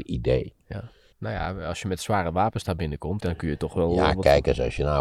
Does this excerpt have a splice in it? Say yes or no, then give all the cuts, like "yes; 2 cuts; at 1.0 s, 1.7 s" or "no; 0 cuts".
yes; 2 cuts; at 1.1 s, 3.2 s